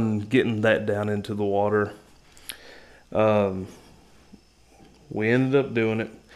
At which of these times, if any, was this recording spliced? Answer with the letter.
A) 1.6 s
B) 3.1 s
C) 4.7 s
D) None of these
D